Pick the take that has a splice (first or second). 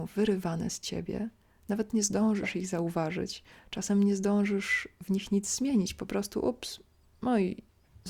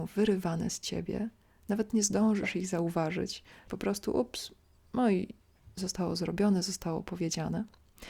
second